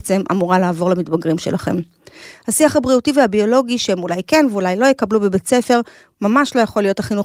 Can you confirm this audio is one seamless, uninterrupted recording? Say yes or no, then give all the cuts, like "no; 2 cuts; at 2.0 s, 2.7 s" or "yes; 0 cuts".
yes; 0 cuts